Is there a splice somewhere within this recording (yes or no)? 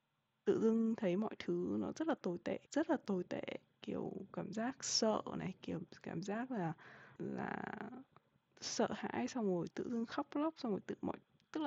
yes